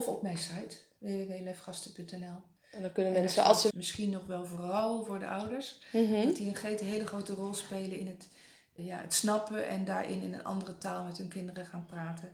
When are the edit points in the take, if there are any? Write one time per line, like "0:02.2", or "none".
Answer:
0:03.7
0:08.8